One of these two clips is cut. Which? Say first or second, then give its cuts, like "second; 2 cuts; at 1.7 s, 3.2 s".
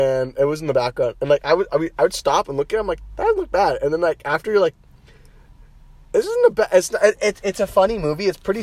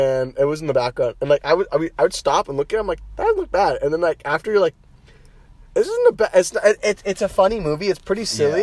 second; 1 cut; at 5.7 s